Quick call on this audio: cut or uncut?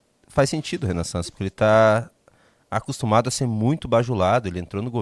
uncut